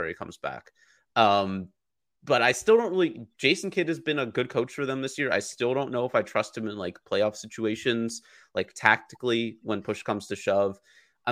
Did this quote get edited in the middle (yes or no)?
yes